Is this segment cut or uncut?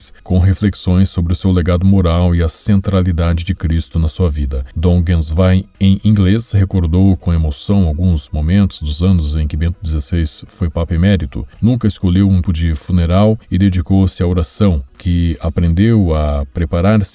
cut